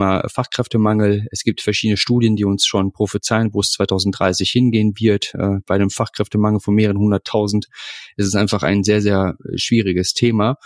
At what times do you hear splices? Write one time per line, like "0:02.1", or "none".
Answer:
none